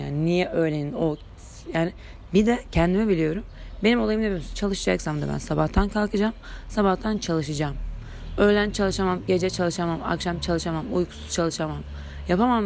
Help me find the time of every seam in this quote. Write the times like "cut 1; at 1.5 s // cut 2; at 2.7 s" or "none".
none